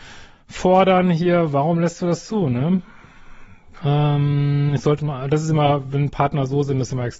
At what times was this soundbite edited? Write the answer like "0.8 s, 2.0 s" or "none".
3.8 s